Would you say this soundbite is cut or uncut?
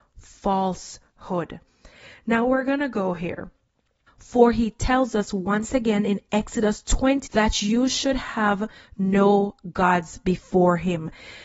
cut